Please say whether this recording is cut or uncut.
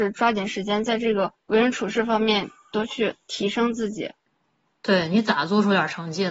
uncut